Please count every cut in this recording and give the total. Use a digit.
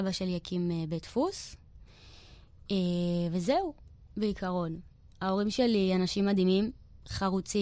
0